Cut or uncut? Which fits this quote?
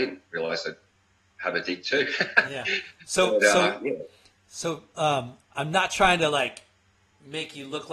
uncut